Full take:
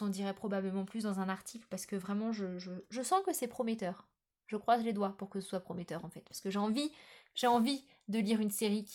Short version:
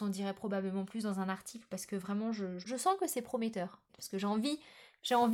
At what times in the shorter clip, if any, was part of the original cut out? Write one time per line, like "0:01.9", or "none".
0:02.6
0:03.9